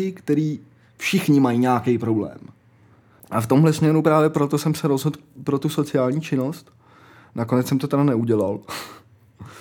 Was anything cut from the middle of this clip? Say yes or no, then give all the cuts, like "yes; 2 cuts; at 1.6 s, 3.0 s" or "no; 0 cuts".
yes; 1 cut; at 3.2 s